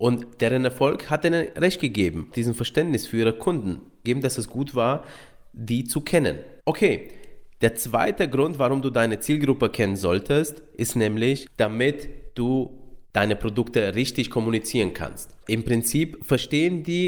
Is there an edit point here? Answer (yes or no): yes